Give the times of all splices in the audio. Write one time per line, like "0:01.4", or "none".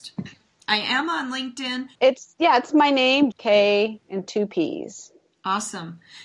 0:02.0
0:03.3